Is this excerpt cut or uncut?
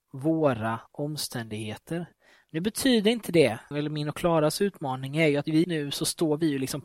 cut